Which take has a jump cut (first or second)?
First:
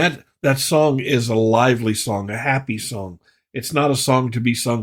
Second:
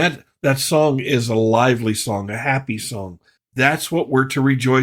second